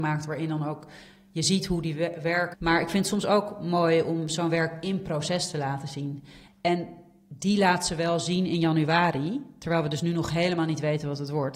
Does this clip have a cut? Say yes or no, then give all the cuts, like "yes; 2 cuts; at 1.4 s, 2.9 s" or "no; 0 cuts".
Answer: yes; 2 cuts; at 2.5 s, 6.5 s